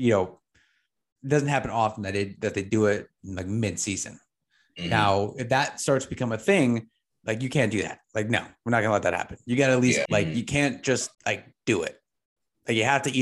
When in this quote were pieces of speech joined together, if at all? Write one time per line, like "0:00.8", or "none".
0:10.1
0:11.1